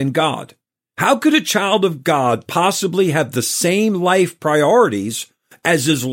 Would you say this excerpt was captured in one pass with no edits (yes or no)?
yes